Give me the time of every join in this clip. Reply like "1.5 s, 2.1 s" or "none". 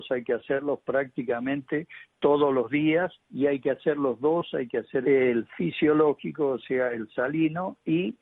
5.0 s